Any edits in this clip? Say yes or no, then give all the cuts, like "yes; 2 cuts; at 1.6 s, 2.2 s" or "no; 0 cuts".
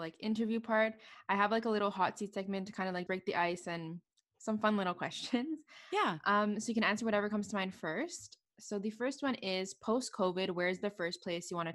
yes; 1 cut; at 3.1 s